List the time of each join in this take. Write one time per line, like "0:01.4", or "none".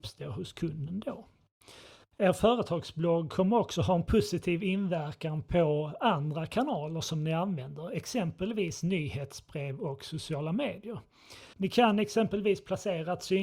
0:02.0
0:11.5